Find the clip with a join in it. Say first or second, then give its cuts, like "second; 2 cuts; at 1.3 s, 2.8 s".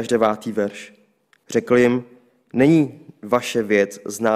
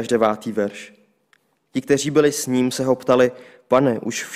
first; 1 cut; at 1.4 s